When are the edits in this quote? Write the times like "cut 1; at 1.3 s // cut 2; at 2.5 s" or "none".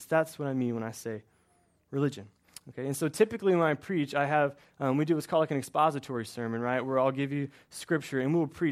none